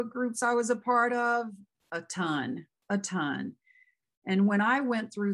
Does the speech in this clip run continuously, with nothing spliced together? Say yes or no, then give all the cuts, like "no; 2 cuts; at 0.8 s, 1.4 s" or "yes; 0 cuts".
yes; 0 cuts